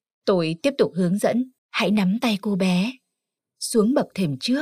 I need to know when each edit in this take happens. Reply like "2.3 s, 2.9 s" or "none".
1.6 s, 3.4 s